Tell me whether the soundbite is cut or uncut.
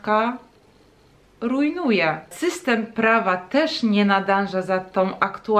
cut